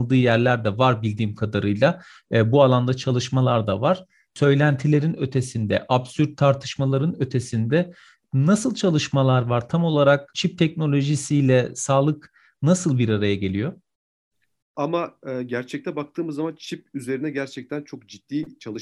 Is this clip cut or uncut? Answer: cut